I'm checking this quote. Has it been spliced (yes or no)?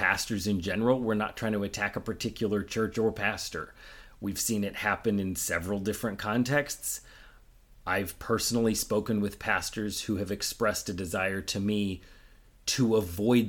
no